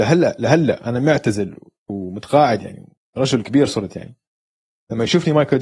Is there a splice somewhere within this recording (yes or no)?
no